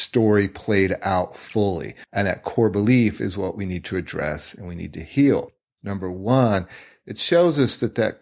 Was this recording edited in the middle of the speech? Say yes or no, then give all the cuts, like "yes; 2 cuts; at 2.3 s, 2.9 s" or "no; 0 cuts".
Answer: yes; 2 cuts; at 2.1 s, 5.8 s